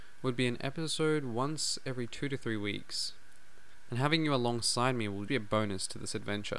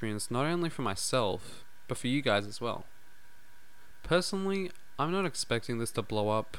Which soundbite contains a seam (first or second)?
first